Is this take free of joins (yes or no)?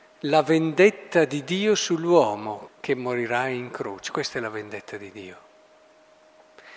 no